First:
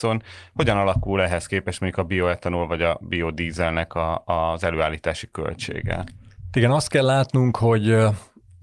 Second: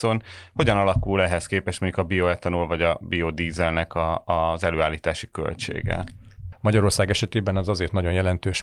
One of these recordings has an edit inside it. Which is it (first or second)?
second